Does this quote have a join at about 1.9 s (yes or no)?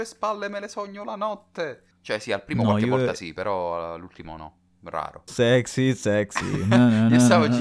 yes